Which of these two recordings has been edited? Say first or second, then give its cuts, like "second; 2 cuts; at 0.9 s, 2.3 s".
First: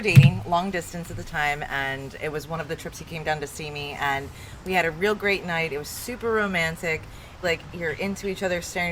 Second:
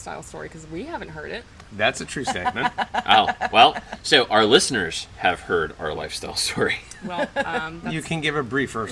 first; 1 cut; at 7.4 s